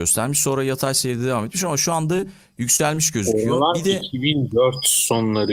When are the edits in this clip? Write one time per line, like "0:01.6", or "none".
none